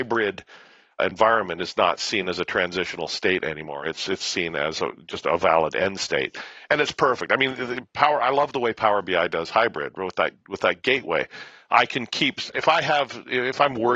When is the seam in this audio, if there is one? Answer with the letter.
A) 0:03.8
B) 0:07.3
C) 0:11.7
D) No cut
D